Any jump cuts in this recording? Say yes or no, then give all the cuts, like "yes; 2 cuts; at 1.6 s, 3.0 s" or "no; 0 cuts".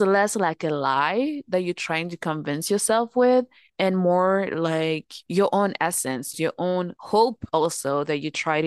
yes; 1 cut; at 6.3 s